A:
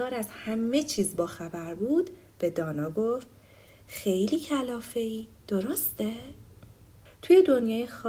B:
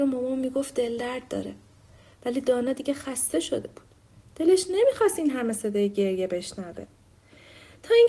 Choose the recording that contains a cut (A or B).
A